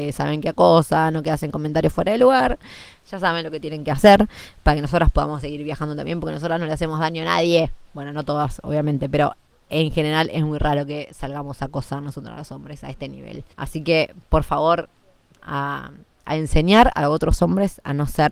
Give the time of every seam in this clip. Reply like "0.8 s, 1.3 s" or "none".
13.5 s, 15.4 s